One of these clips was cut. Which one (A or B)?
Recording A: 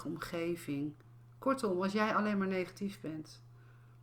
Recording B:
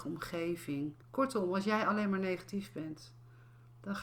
B